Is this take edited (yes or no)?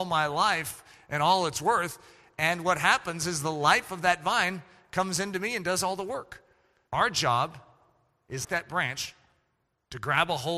yes